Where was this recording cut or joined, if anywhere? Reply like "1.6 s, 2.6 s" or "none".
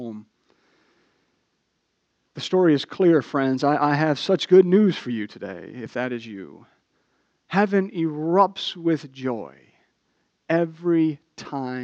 none

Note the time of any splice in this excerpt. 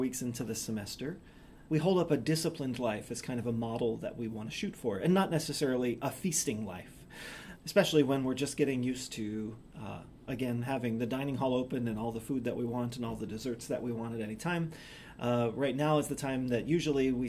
1.7 s, 7.6 s

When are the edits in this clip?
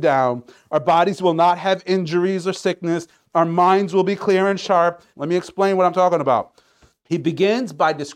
5.1 s, 6.9 s

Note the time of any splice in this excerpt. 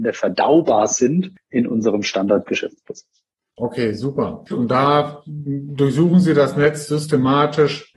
4.5 s

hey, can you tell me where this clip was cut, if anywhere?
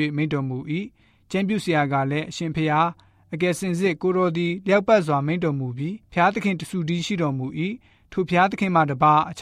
6.0 s

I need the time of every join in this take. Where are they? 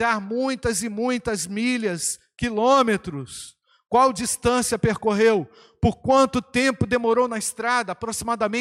none

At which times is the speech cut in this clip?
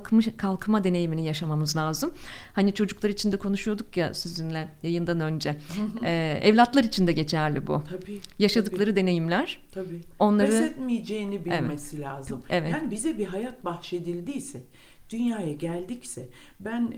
none

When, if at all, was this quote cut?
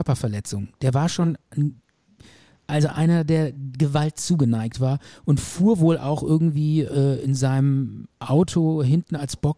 2.9 s

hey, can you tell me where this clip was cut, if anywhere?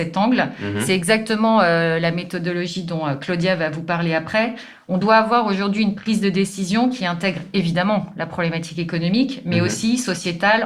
none

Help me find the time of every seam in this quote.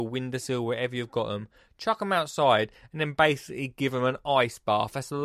none

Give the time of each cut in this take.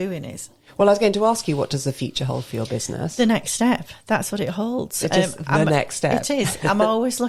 none

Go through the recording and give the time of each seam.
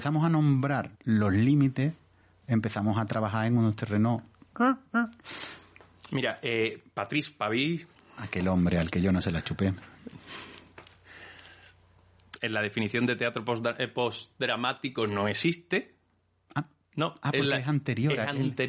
0.9 s

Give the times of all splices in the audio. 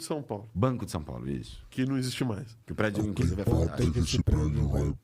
2.6 s

